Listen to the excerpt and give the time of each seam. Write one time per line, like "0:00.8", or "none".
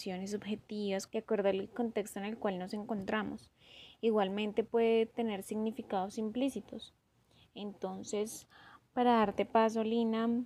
0:01.1